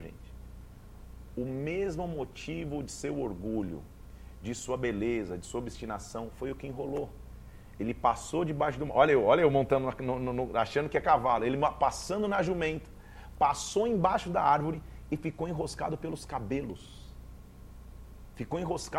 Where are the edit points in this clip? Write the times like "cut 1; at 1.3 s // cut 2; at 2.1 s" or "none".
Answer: none